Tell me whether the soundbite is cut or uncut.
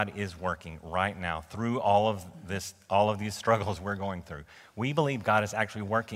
uncut